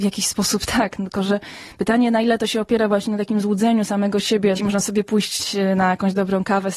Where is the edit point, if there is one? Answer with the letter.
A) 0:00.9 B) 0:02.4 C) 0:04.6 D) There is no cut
C